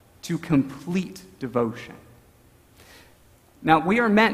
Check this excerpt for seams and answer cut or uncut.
uncut